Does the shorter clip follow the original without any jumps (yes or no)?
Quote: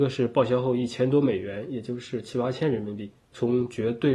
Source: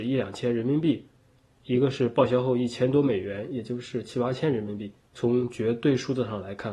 yes